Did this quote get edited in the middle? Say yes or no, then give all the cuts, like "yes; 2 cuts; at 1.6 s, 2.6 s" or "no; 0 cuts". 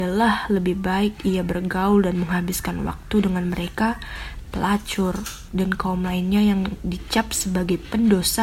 yes; 2 cuts; at 4.4 s, 5.5 s